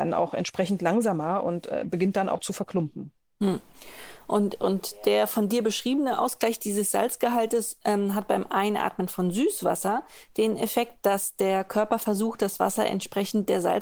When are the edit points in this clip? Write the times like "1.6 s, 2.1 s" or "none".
none